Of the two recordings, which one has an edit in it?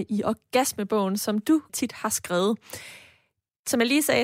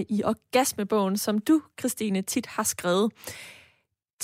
first; 1 cut; at 1.7 s

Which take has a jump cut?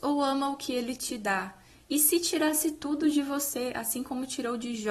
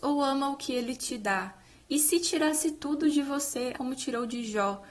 second; 1 cut; at 3.7 s

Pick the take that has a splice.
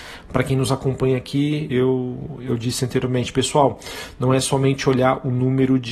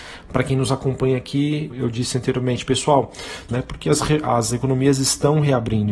second; 2 cuts; at 1.7 s, 3.5 s

